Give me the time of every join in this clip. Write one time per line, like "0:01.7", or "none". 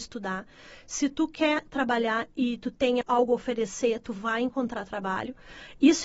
0:03.0